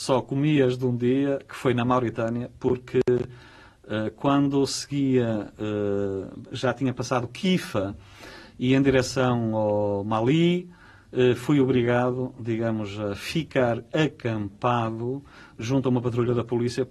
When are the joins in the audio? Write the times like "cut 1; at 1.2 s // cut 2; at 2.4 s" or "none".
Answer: none